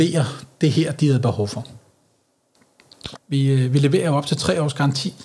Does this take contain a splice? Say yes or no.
yes